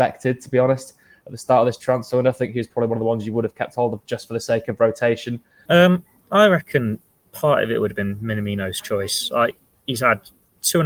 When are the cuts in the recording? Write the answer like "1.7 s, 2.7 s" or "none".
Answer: 5.7 s